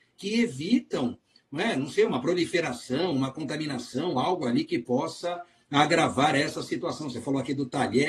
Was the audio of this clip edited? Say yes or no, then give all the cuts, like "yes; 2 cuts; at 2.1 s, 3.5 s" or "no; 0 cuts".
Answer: no; 0 cuts